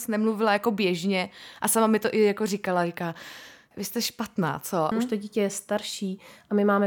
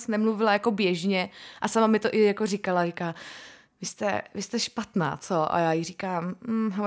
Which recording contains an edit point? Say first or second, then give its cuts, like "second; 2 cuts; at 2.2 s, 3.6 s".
first; 2 cuts; at 3.7 s, 4.9 s